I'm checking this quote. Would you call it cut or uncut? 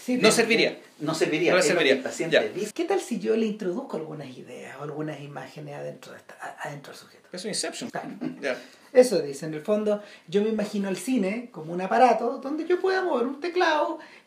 cut